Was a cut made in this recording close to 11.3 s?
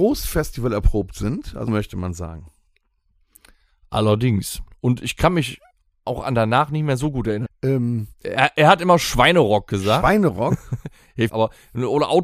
yes; 3 cuts; at 1.7 s, 7.5 s, 11.3 s

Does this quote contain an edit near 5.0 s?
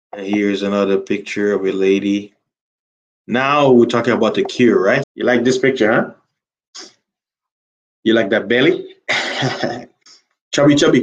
yes; 1 cut; at 5.0 s

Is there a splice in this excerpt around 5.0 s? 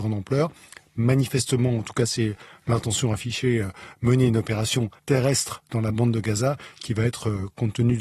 yes; 1 cut; at 5.0 s

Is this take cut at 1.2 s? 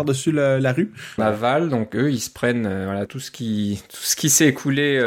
yes; 2 cuts; at 1.2 s, 3.1 s

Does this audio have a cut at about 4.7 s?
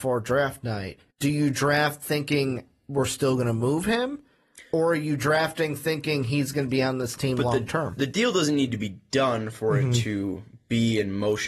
no; 1 cut; at 1.1 s

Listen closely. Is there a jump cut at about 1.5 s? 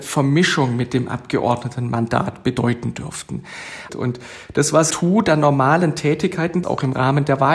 no; 3 cuts; at 3.9 s, 4.9 s, 6.6 s

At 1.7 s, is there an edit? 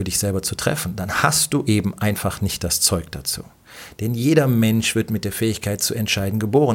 no; 0 cuts

